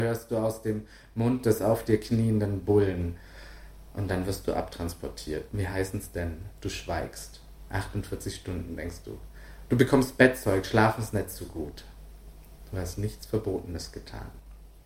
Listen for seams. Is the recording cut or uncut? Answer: cut